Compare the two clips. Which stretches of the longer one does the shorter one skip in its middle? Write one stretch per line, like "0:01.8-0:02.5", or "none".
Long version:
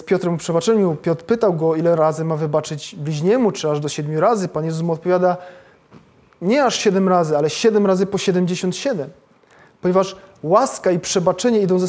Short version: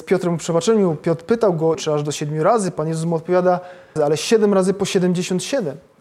0:01.7-0:03.5
0:05.7-0:07.3